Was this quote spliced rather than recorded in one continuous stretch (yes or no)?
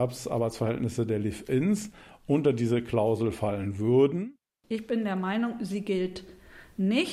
no